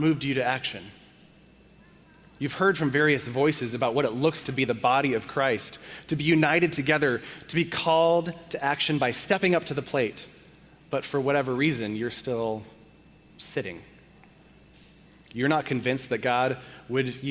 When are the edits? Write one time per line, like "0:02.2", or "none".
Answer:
0:04.4